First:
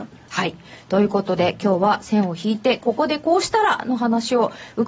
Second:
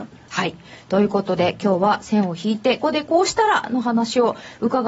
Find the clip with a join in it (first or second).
second